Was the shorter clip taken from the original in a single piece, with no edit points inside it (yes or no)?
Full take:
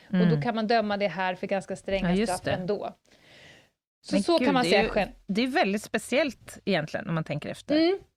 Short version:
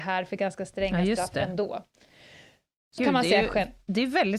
no